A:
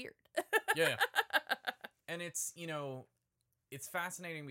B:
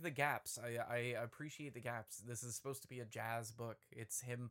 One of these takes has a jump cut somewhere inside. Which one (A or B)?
A